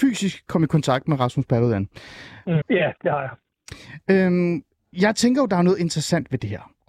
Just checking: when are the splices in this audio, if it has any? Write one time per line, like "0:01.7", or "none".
0:02.6